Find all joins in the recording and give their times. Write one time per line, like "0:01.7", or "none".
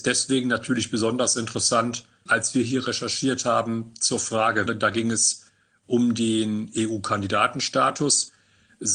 0:02.3
0:04.7